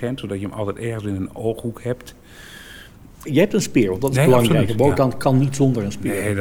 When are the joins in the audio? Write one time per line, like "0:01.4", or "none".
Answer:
0:03.3